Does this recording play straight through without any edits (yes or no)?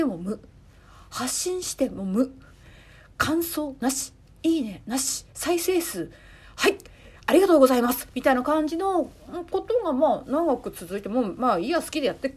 yes